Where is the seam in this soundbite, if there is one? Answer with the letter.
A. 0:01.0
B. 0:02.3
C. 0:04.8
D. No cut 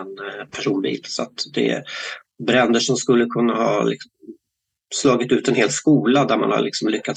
B